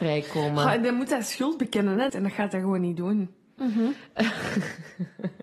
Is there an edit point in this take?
yes; 2 cuts; at 2.1 s, 3.6 s

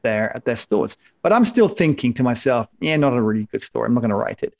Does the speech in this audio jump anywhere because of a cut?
no; 0 cuts

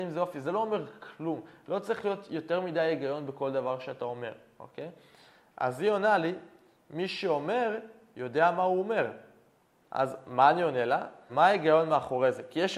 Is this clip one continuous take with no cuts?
no; 2 cuts; at 9.8 s, 11.3 s

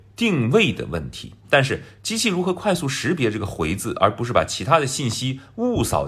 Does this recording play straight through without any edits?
no; 1 cut; at 1.4 s

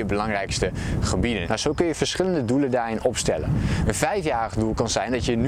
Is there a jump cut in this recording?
yes; 1 cut; at 1.4 s

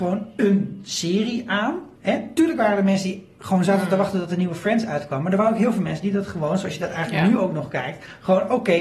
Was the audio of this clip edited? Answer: yes; 1 cut; at 2.0 s

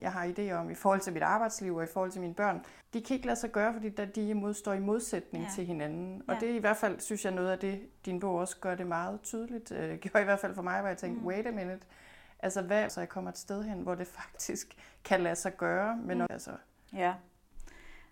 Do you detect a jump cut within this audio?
yes; 3 cuts; at 2.8 s, 12.9 s, 16.3 s

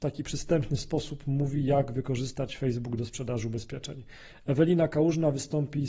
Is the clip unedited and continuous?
yes; 0 cuts

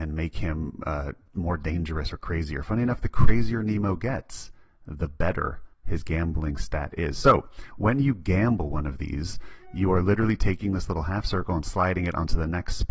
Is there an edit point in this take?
yes; 1 cut; at 5.7 s

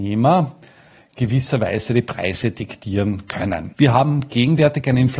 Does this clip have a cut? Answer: yes; 1 cut; at 3.7 s

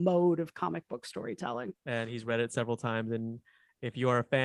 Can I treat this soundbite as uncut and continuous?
no; 1 cut; at 1.7 s

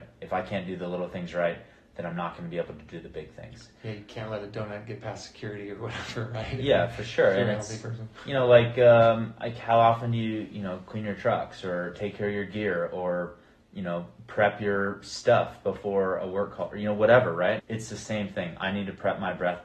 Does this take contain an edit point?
yes; 1 cut; at 17.6 s

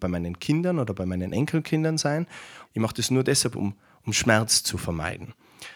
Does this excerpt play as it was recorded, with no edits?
no; 1 cut; at 2.7 s

